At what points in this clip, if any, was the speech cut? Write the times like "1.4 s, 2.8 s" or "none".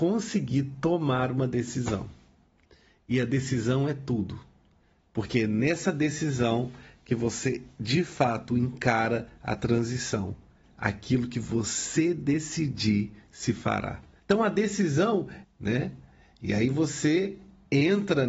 10.6 s, 14.2 s, 15.4 s